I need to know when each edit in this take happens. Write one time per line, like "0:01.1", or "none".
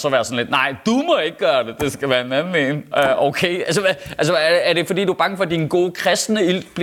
none